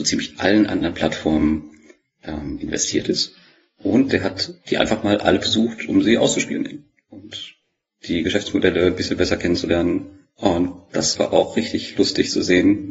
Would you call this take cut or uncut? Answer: cut